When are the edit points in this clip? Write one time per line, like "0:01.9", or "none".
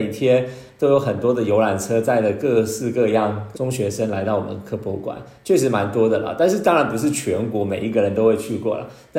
0:03.5